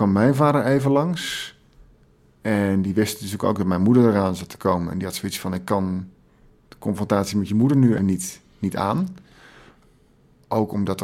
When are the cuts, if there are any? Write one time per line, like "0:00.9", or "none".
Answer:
0:08.0